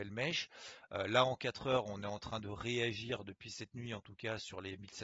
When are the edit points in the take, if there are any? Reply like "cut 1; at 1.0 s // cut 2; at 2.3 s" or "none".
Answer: none